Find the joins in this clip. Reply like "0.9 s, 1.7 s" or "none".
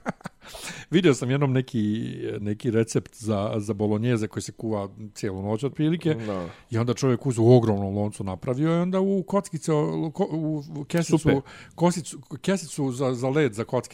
2.4 s